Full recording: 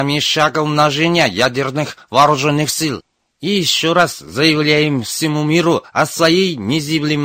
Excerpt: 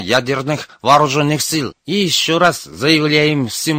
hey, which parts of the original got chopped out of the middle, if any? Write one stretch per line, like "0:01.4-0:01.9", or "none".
0:03.1-0:03.3